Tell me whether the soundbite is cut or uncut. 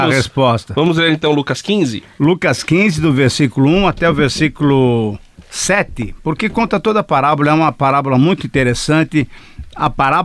uncut